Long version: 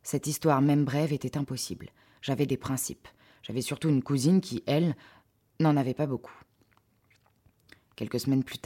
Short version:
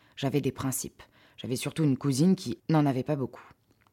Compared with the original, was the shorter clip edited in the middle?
yes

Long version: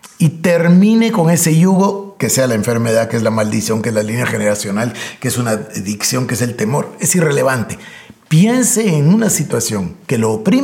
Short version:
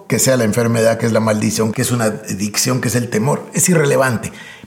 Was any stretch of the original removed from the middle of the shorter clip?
yes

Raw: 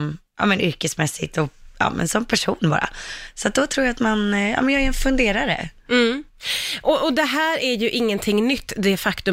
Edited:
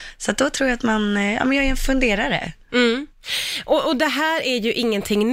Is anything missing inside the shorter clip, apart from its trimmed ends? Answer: no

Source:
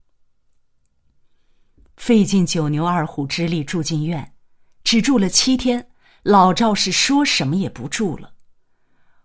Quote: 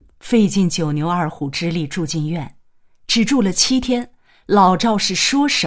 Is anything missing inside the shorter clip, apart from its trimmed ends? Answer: no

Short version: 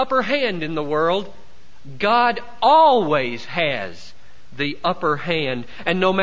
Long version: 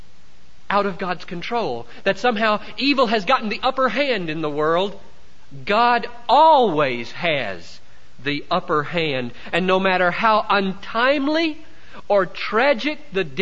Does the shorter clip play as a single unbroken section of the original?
yes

